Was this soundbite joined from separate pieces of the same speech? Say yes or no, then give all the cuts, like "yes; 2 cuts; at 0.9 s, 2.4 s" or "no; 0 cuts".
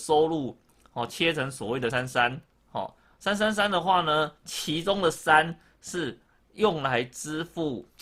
yes; 1 cut; at 1.9 s